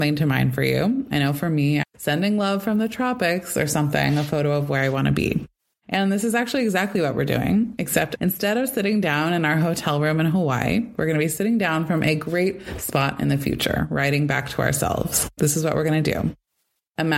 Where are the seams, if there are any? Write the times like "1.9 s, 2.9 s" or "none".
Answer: 1.8 s, 15.4 s